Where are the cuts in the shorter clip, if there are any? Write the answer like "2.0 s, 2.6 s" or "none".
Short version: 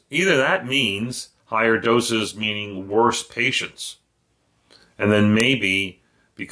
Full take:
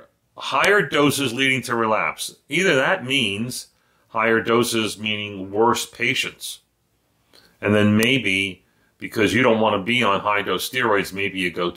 1.4 s